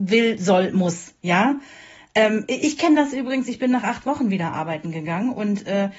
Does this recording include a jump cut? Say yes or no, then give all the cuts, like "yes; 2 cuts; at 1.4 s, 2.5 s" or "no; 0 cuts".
no; 0 cuts